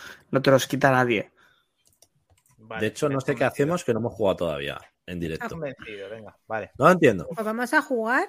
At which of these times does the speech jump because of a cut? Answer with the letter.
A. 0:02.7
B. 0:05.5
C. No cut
B